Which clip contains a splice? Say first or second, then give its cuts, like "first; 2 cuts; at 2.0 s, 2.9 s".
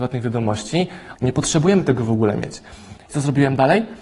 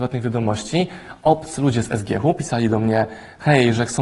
first; 2 cuts; at 1.2 s, 3.0 s